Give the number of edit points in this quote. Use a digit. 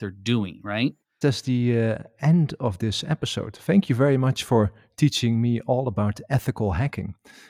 1